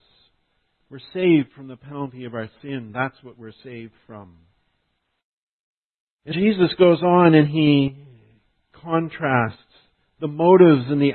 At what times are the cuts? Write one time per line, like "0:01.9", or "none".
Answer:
0:06.3